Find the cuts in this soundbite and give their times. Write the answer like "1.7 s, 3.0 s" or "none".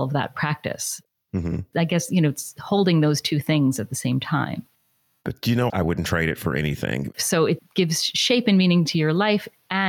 5.7 s, 7.1 s